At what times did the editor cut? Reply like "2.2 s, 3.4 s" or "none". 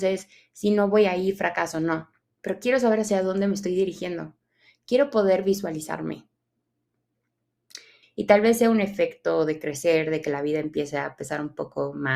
8.0 s